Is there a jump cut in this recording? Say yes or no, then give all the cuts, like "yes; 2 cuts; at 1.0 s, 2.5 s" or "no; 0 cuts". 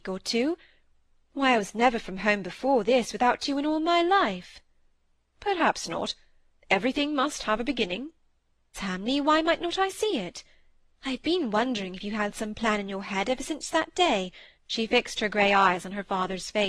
yes; 3 cuts; at 6.6 s, 8.7 s, 14.6 s